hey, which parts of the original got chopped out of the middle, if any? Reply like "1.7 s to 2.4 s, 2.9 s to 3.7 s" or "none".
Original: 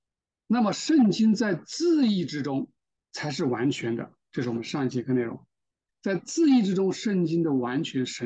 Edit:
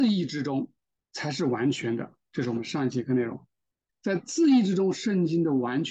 none